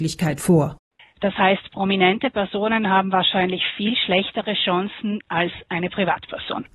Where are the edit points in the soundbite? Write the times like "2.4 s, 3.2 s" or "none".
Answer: 1.0 s, 5.3 s